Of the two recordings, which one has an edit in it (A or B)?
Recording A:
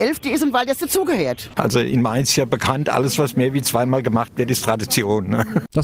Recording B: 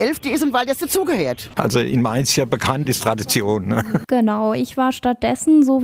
B